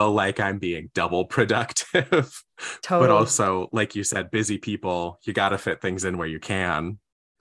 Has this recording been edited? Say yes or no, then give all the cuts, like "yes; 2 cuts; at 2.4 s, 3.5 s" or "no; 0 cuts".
no; 0 cuts